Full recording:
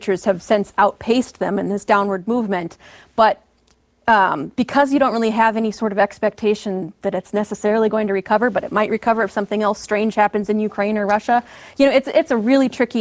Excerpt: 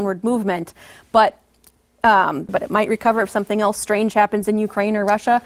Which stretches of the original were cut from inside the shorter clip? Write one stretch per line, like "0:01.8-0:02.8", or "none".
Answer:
0:04.5-0:08.5